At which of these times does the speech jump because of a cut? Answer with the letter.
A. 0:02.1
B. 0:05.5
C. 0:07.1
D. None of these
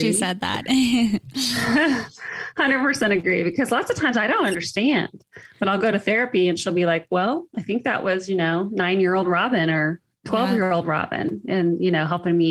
D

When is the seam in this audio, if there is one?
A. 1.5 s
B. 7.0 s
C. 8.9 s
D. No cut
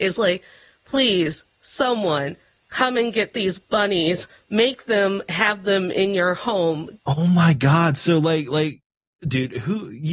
B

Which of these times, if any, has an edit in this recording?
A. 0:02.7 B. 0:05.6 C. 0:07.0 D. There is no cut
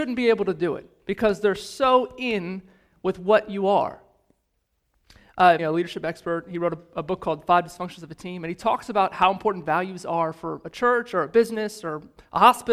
B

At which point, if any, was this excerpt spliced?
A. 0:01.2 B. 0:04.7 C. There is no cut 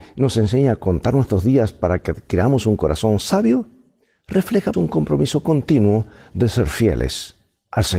B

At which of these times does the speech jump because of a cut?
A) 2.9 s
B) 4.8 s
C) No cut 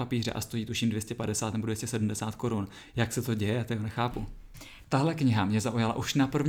B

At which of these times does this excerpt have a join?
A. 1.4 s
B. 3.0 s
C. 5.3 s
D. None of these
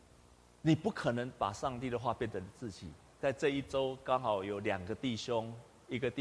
D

